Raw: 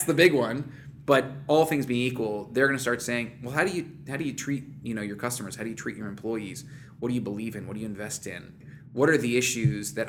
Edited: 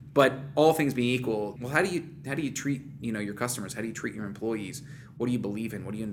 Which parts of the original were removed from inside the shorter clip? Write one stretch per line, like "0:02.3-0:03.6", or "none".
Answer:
0:02.5-0:03.4